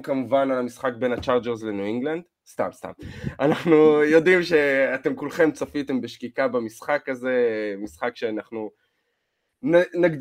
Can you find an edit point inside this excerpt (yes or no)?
no